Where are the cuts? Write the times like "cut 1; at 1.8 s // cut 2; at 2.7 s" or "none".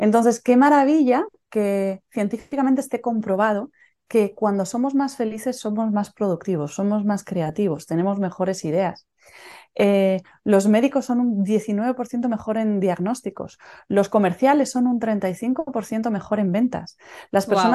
none